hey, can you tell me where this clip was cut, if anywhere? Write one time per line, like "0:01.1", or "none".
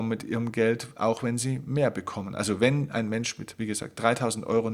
none